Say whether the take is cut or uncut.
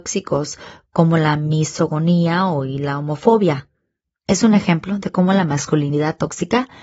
cut